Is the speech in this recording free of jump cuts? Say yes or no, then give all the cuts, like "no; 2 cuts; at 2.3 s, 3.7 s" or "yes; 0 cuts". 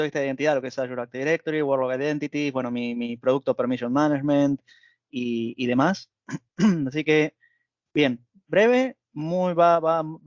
yes; 0 cuts